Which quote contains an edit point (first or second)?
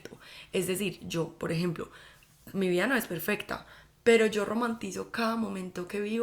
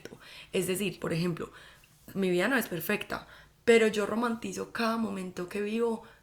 second